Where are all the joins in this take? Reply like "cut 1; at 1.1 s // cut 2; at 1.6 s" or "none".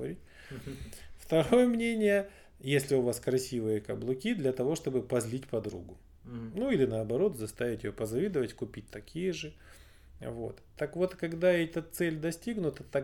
none